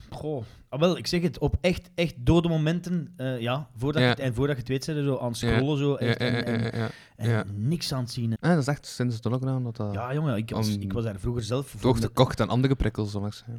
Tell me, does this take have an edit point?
yes; 1 cut; at 8.4 s

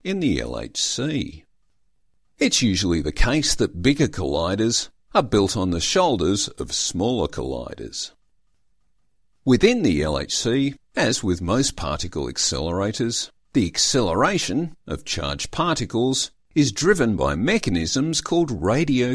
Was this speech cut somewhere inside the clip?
no; 0 cuts

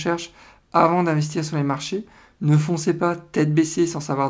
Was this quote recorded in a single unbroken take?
yes; 0 cuts

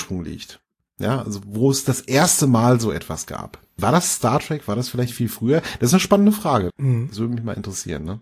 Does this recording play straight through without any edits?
no; 1 cut; at 6.7 s

